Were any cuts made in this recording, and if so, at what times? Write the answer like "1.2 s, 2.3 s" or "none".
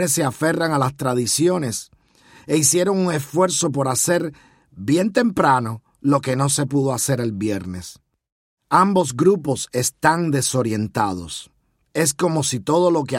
none

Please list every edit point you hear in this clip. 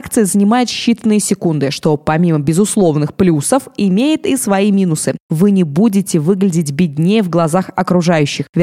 5.2 s

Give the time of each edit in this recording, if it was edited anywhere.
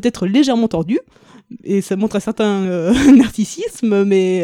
none

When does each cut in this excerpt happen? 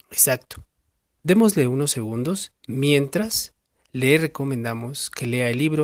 1.1 s, 2.6 s

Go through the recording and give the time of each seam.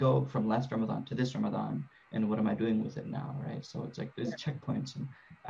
none

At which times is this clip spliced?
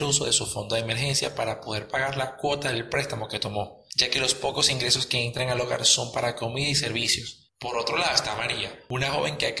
none

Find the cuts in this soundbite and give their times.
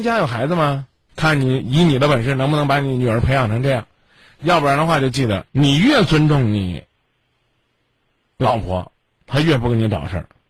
1.1 s, 5.5 s

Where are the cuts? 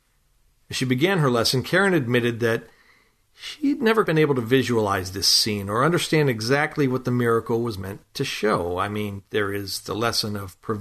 4.1 s

